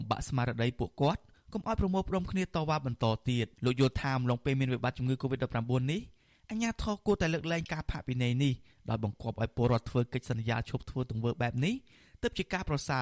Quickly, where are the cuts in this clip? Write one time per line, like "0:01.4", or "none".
0:03.5